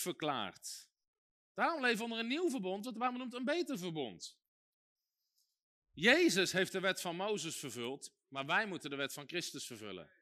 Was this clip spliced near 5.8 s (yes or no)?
yes